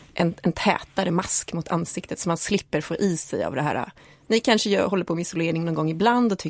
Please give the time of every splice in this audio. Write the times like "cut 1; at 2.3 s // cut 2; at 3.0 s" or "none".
none

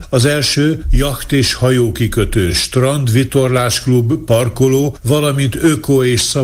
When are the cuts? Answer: none

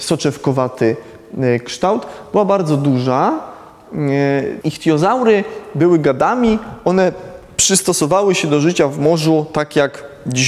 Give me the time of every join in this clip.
cut 1; at 4.6 s

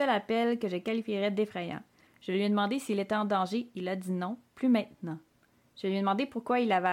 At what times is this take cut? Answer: cut 1; at 2.1 s

